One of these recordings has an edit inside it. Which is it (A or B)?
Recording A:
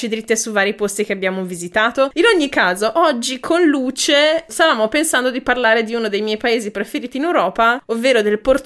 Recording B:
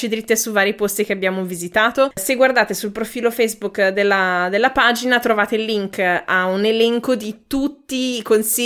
A